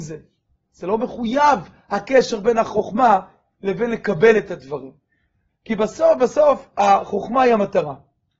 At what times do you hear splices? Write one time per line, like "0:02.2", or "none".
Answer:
0:05.5